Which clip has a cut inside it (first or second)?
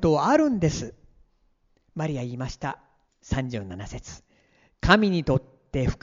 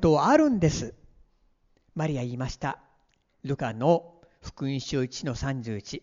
first